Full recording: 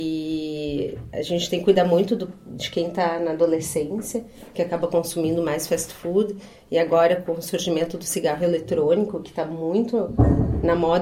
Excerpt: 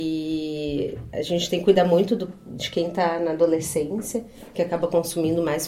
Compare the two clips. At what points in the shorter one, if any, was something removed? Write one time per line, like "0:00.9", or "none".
none